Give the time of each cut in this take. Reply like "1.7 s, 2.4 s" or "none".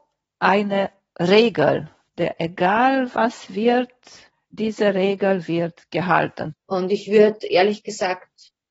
2.1 s, 6.5 s